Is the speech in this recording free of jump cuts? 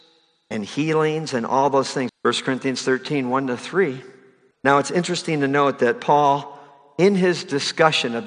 no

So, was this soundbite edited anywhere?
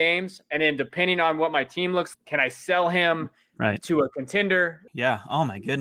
yes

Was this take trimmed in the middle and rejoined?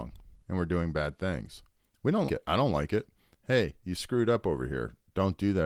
yes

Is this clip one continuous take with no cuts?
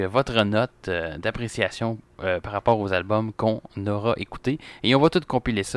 yes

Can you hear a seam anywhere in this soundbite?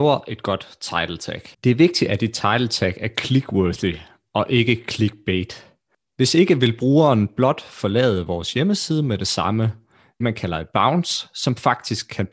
yes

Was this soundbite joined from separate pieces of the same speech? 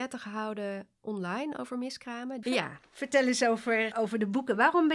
yes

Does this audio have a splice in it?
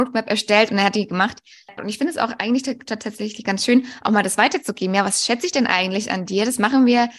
yes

